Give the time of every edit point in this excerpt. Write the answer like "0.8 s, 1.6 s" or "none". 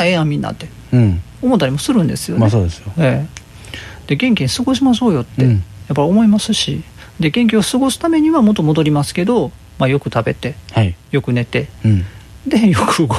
none